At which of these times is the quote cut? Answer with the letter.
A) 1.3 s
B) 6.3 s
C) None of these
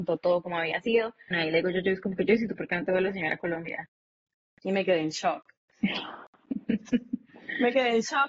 A